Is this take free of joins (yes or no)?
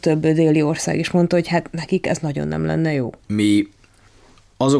no